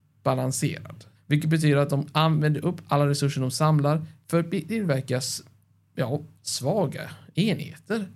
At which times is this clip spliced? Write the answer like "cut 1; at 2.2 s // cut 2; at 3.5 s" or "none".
cut 1; at 1.1 s

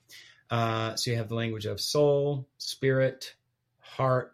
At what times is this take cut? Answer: cut 1; at 2.5 s

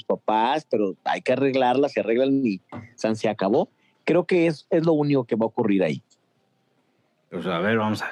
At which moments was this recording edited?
none

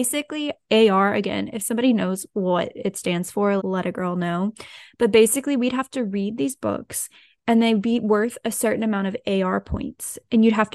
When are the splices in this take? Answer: cut 1; at 3.6 s

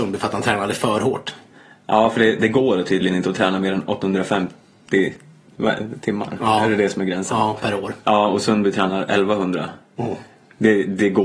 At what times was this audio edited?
none

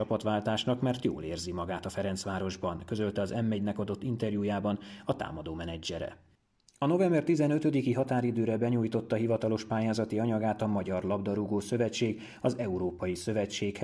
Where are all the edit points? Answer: none

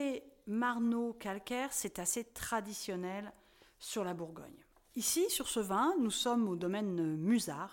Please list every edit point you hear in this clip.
none

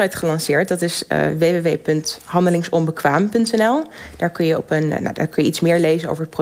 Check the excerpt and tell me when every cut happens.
none

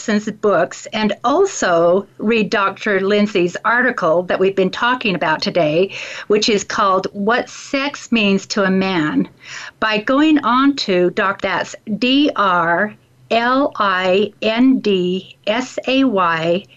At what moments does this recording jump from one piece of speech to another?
cut 1; at 11.4 s

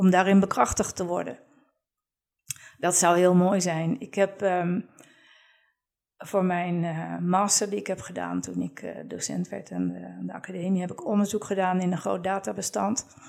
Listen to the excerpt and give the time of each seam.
none

